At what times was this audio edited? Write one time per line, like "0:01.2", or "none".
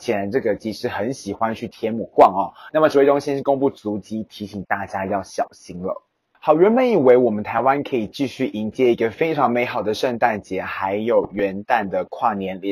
0:02.7